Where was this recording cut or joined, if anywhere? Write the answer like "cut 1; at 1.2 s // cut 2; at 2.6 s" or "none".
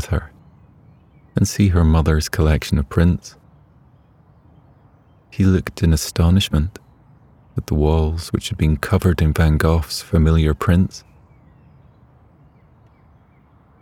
cut 1; at 5.3 s

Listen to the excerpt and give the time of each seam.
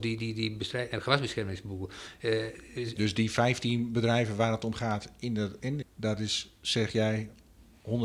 cut 1; at 3.0 s // cut 2; at 5.8 s

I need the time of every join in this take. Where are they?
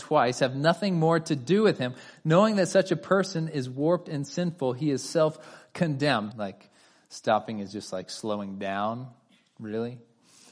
cut 1; at 6.3 s

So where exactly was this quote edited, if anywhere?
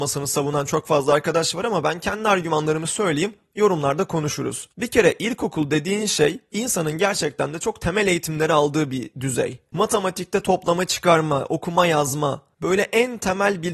none

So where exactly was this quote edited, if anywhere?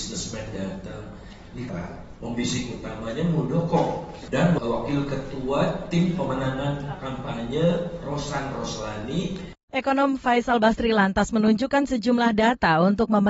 cut 1; at 1.7 s

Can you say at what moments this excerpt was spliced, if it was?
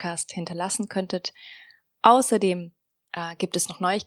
none

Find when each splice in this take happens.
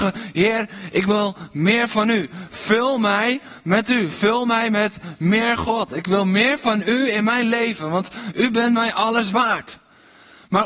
none

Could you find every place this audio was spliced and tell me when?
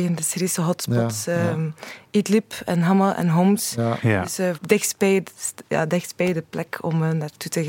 cut 1; at 4.5 s

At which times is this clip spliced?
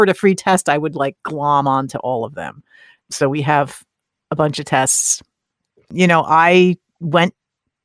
none

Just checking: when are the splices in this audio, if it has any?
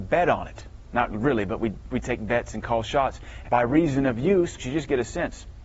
cut 1; at 3.4 s // cut 2; at 4.6 s

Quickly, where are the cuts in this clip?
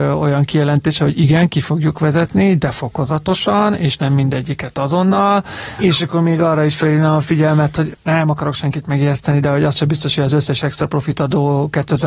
cut 1; at 5.8 s

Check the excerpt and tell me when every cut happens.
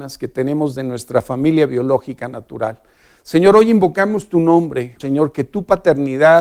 cut 1; at 5.0 s

